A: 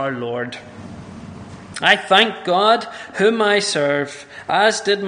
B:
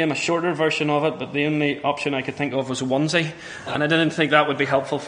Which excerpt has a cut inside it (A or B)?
B